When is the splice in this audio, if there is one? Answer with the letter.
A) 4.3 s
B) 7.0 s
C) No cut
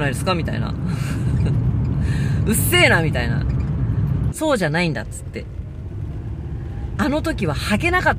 A